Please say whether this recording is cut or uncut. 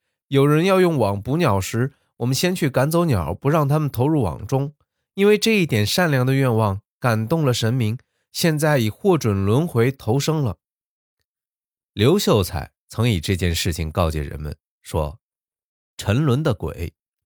uncut